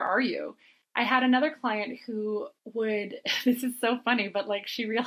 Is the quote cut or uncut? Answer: uncut